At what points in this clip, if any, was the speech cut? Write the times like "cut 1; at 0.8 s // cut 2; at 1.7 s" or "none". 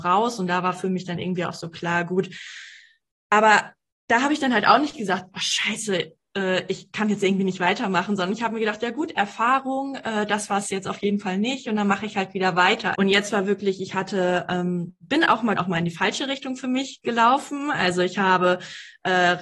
cut 1; at 12.9 s // cut 2; at 15.5 s